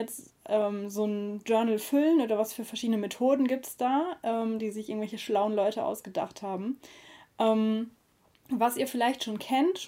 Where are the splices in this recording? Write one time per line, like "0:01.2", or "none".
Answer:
0:04.6

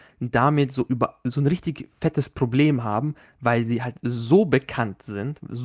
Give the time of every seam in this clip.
none

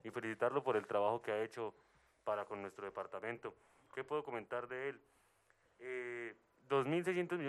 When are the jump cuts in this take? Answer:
none

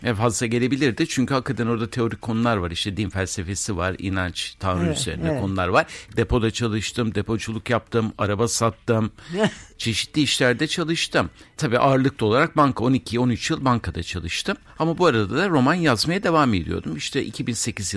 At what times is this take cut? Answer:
0:06.1

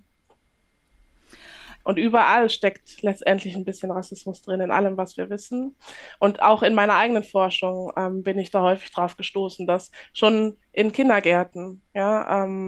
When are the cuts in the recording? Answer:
0:01.8

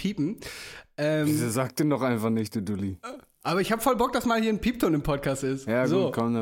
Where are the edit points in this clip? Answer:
none

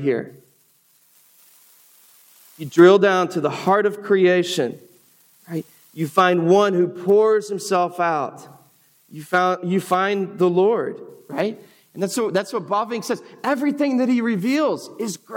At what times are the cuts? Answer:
none

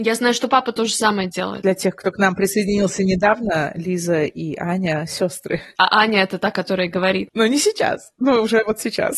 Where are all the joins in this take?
none

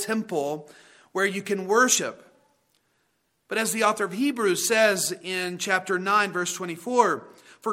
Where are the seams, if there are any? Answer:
none

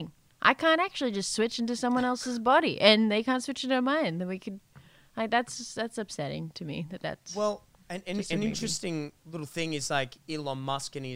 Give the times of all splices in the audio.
none

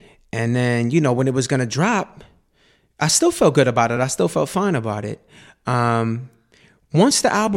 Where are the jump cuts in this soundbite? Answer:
none

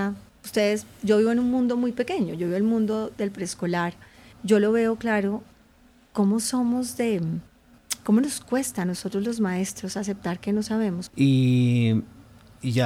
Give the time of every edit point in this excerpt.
0:04.3
0:11.1

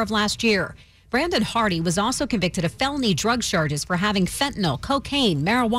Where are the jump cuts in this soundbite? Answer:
none

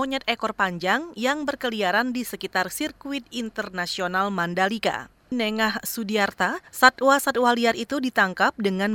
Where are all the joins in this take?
0:05.3
0:06.7

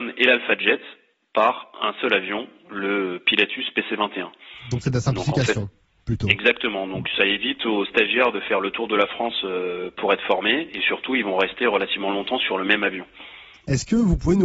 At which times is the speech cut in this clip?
none

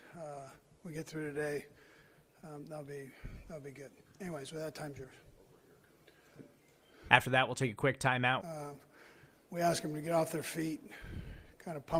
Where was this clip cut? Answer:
0:07.1
0:08.4

